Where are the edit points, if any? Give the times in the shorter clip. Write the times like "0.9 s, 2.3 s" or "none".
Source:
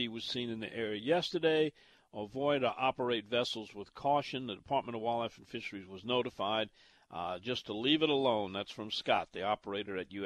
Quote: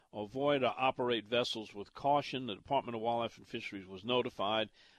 none